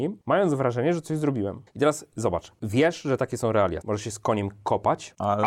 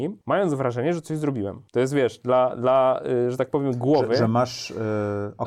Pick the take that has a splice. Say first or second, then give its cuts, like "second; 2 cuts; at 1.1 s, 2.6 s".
first; 2 cuts; at 1.7 s, 3.8 s